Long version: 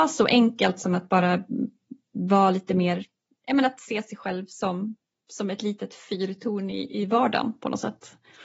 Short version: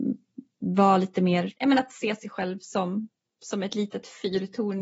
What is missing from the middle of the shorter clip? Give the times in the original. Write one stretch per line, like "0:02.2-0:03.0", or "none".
0:03.1-0:03.4